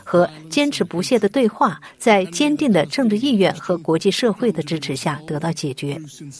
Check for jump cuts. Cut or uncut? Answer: uncut